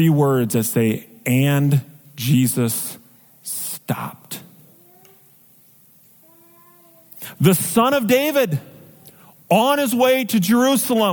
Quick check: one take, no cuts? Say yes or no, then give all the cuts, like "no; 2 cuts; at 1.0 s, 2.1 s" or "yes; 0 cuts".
yes; 0 cuts